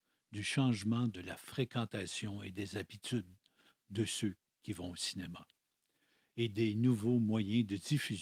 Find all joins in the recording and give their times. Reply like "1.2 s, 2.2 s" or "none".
none